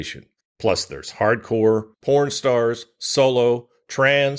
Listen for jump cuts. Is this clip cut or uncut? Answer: cut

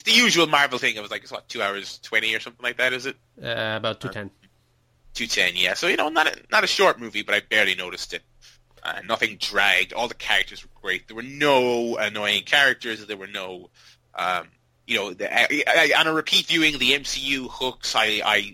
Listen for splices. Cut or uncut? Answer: uncut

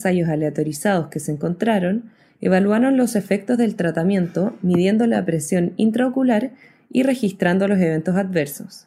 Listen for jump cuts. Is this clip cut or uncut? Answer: uncut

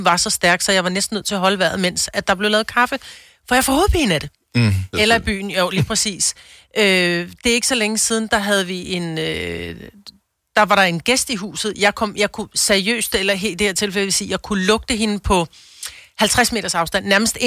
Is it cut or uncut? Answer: cut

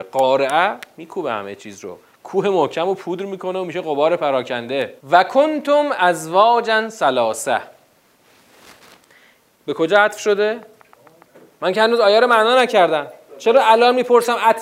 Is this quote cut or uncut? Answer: cut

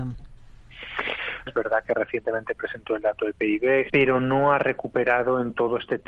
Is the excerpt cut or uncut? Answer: cut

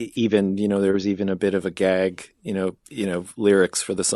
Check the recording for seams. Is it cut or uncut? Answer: cut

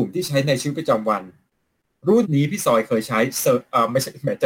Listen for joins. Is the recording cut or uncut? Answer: cut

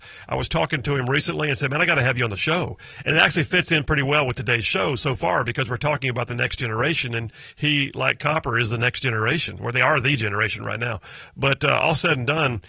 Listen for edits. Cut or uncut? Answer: uncut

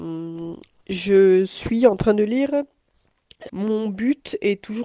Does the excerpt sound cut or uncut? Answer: cut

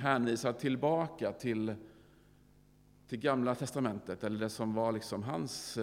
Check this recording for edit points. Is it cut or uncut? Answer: uncut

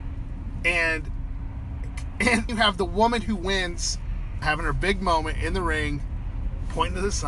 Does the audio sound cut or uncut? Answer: cut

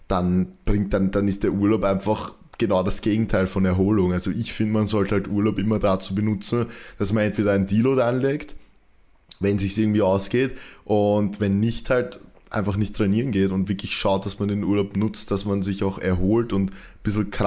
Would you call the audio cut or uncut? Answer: uncut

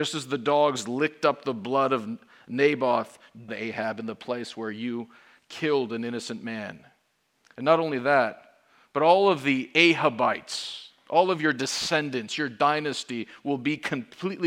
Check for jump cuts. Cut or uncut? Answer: cut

